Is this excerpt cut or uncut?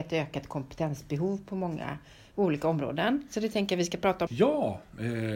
cut